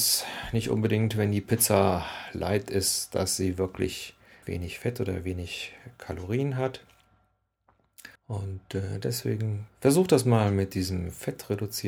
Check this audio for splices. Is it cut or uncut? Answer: cut